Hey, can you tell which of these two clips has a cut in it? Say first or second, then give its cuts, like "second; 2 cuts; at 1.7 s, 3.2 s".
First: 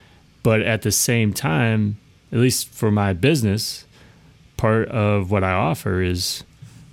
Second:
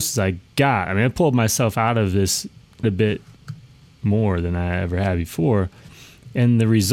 second; 1 cut; at 2.8 s